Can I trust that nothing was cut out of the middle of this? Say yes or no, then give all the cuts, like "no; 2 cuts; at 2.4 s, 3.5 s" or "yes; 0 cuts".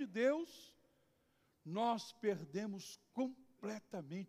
yes; 0 cuts